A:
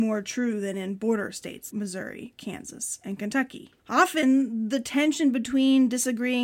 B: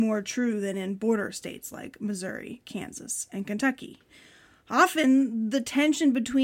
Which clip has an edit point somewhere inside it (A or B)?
A